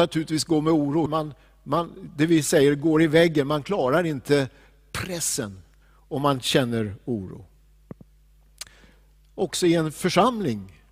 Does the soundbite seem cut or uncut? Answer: cut